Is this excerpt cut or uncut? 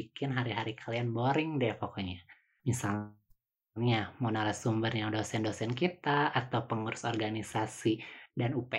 cut